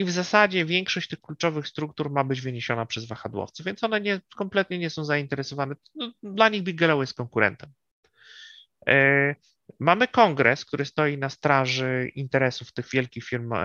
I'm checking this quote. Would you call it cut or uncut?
uncut